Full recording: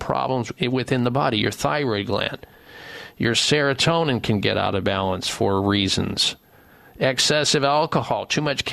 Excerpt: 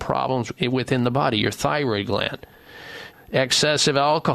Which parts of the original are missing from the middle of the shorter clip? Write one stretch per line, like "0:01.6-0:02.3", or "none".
0:03.1-0:06.8